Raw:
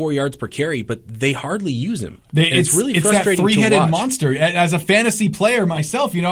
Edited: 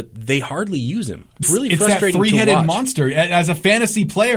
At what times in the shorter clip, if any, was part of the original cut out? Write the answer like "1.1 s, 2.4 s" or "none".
1.4 s